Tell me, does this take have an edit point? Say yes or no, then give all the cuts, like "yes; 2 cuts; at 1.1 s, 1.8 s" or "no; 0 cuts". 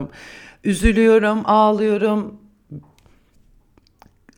no; 0 cuts